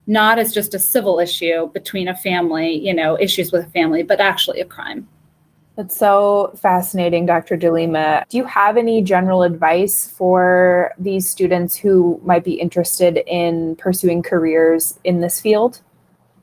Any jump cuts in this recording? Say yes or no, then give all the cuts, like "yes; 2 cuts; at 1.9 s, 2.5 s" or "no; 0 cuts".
yes; 1 cut; at 8.2 s